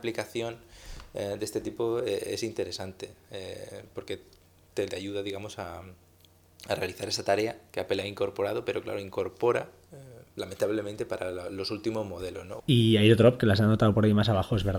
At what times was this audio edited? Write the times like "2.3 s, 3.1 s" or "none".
4.9 s, 12.6 s